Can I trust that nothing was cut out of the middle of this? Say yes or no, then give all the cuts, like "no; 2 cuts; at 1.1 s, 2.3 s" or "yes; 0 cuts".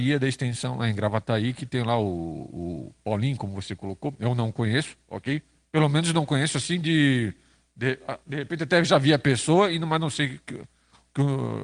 yes; 0 cuts